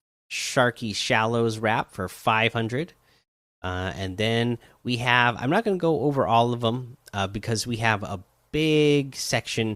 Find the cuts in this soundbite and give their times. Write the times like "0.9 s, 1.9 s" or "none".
none